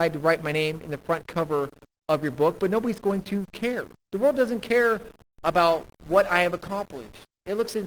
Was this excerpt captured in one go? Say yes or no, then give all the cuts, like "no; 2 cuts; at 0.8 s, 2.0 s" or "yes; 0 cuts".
yes; 0 cuts